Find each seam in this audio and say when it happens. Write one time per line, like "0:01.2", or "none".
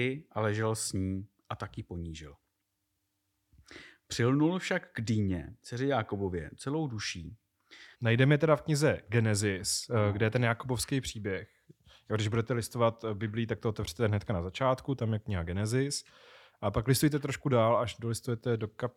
0:07.9